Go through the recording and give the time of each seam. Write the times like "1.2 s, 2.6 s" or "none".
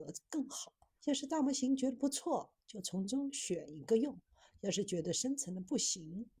1.0 s